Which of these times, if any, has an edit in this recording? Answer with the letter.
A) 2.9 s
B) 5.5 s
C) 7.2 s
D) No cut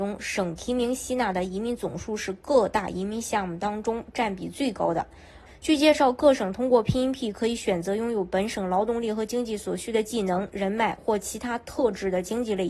B